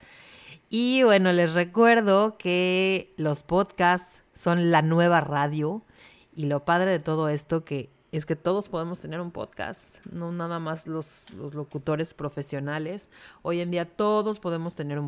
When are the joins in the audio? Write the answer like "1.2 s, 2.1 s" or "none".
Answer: none